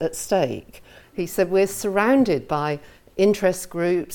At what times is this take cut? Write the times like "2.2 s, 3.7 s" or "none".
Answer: 1.0 s